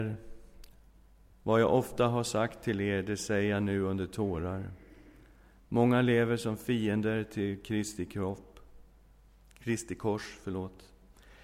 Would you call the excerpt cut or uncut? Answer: uncut